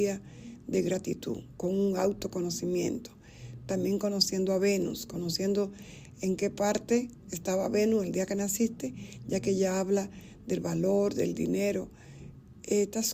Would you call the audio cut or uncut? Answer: uncut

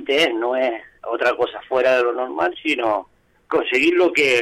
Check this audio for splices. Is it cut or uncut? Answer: uncut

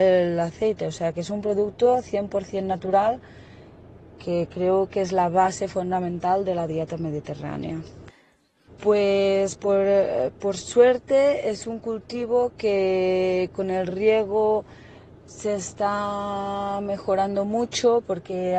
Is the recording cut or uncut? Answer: cut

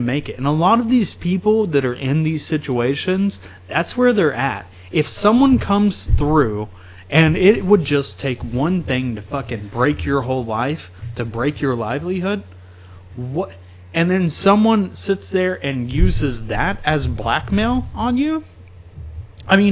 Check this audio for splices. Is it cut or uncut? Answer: uncut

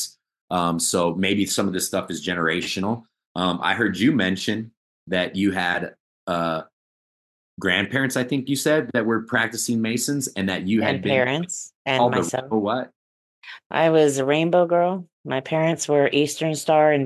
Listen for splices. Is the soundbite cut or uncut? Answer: cut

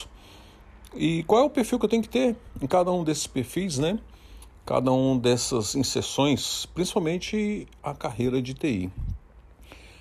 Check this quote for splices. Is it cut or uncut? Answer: uncut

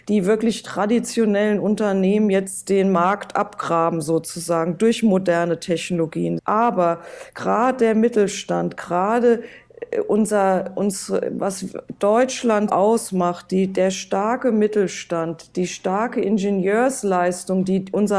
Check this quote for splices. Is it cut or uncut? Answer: cut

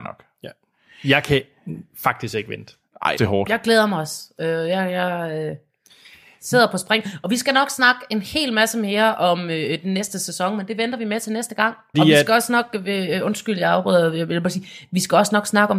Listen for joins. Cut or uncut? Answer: cut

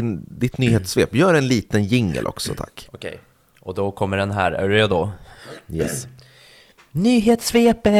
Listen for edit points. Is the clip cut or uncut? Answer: uncut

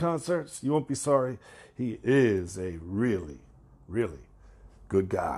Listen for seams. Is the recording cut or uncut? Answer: uncut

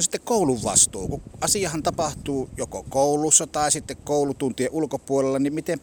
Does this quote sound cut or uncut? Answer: uncut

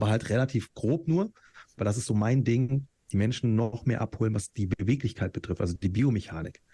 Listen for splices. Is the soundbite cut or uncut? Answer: cut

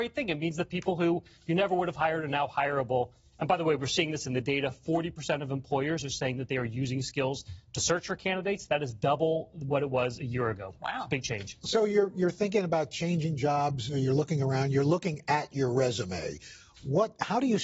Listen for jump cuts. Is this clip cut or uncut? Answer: uncut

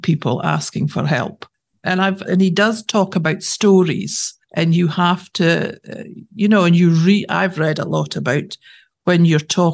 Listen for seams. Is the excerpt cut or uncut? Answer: cut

